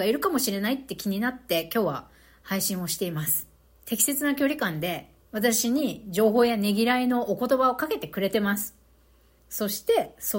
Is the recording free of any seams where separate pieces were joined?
no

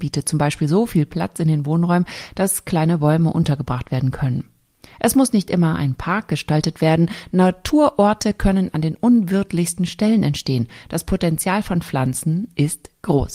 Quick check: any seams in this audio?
no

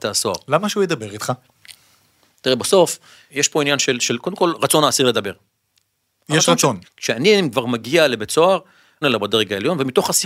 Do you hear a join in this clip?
yes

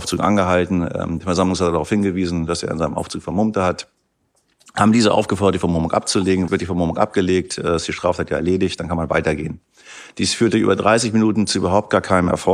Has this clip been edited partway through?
yes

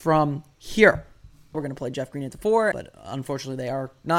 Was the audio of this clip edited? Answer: yes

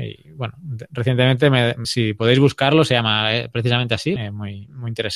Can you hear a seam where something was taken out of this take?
yes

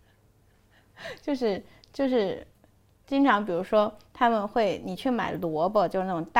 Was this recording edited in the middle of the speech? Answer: no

